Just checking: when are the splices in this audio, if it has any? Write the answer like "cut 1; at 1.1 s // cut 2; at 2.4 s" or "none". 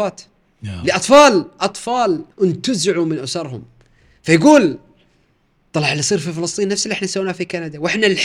cut 1; at 2.3 s